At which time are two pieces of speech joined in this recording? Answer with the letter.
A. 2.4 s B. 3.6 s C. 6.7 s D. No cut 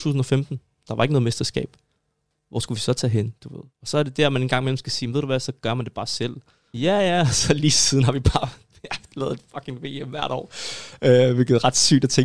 C